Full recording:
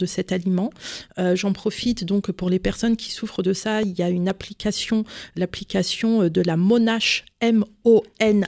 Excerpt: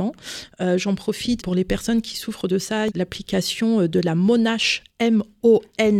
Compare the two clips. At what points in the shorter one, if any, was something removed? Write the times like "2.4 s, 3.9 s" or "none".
1.4 s, 2.9 s